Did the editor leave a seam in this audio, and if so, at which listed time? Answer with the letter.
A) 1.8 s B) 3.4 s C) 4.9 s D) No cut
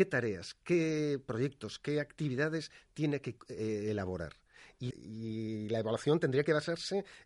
C